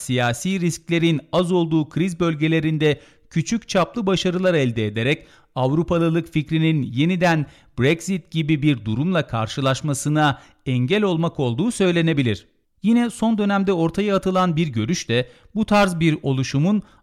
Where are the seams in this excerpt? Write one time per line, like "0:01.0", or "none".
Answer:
0:12.7